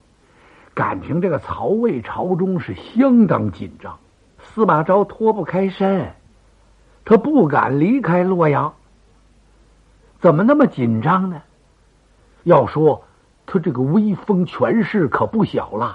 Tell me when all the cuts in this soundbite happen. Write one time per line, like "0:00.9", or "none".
0:12.4